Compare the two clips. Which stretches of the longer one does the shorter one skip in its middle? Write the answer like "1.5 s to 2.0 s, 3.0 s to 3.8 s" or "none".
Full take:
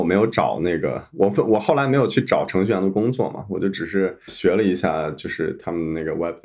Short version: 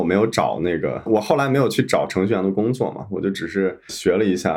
1.1 s to 1.4 s